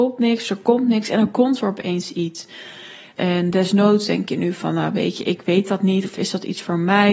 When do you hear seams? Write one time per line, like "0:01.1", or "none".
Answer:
0:03.2